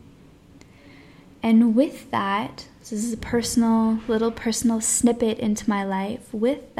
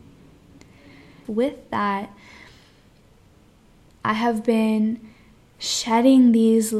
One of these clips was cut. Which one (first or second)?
second